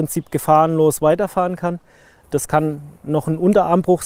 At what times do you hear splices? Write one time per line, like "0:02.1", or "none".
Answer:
0:02.2